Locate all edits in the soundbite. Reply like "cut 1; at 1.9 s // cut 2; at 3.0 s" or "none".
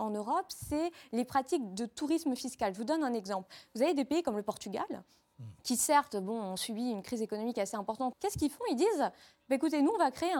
cut 1; at 5.6 s // cut 2; at 8.1 s